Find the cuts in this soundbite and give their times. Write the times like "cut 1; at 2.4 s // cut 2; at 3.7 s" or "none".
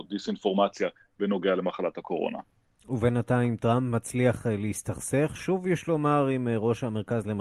none